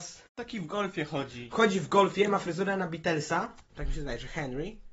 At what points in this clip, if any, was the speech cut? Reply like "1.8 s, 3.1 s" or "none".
3.7 s